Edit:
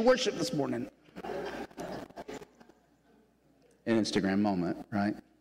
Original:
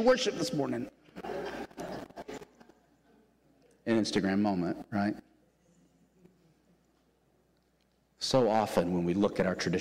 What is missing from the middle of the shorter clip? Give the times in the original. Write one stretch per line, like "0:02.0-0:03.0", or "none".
none